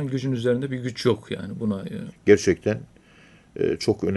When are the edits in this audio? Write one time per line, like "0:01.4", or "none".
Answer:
0:02.1